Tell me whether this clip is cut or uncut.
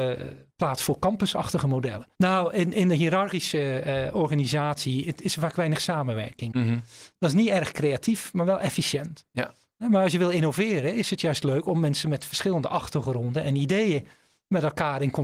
cut